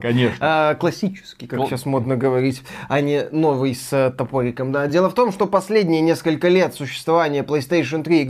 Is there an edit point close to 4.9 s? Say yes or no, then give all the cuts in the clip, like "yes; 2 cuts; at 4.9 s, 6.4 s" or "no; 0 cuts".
no; 0 cuts